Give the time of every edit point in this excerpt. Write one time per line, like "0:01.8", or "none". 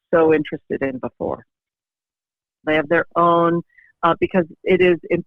0:02.6